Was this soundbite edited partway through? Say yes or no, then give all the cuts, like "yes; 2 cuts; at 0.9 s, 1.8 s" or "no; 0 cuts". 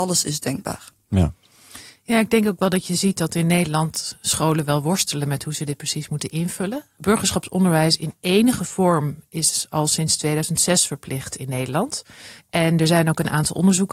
yes; 1 cut; at 12.4 s